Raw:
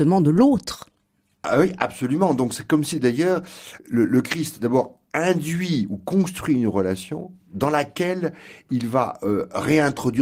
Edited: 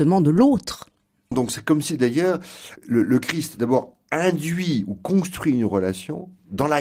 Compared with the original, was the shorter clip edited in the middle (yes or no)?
yes